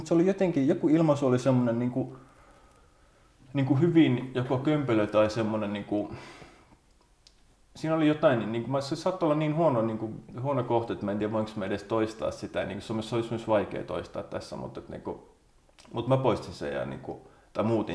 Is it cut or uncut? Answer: uncut